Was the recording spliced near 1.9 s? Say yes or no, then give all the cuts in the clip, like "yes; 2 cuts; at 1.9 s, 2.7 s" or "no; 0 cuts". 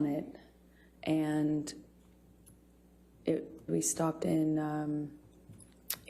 no; 1 cut; at 3.7 s